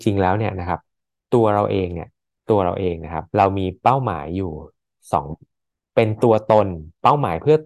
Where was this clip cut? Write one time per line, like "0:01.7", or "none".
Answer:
0:03.3
0:05.3